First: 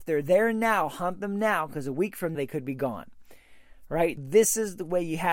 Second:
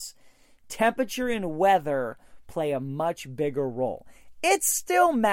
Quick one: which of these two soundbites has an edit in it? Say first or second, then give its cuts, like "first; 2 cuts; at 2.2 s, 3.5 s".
first; 2 cuts; at 2.3 s, 4.2 s